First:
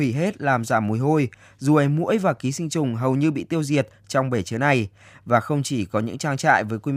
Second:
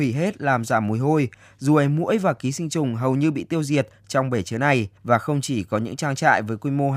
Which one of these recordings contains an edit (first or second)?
second